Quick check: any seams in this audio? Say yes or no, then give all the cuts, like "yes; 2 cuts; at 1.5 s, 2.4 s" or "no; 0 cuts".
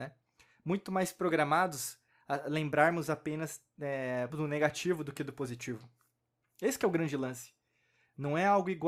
yes; 1 cut; at 4.3 s